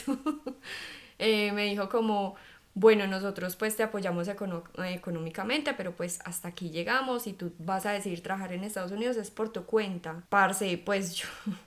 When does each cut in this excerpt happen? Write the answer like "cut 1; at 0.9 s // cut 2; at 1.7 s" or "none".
cut 1; at 10.3 s